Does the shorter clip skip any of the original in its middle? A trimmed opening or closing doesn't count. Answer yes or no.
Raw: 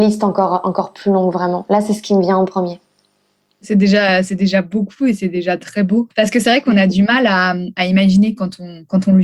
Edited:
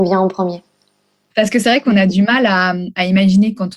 yes